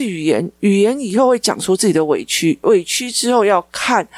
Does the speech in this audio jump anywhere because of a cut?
no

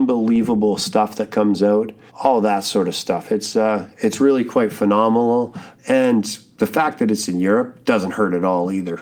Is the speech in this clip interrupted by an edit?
yes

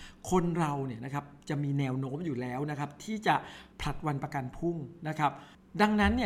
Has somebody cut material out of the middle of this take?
yes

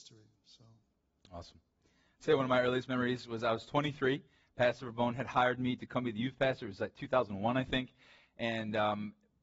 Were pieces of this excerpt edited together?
no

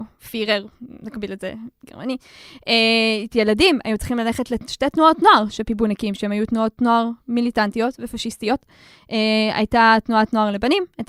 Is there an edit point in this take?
no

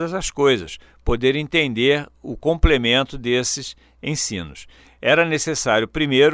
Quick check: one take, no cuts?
no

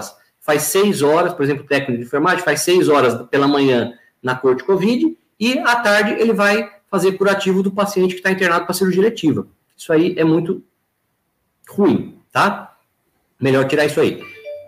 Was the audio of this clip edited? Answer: no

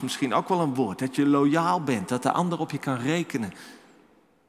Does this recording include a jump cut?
no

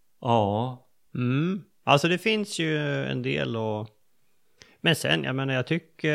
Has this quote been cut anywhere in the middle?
no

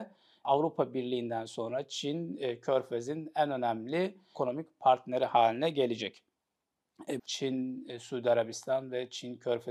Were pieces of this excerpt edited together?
yes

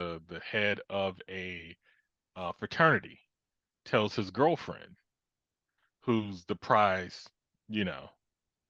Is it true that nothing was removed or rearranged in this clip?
yes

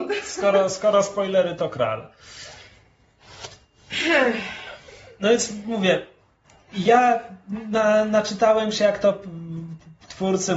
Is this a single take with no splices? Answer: yes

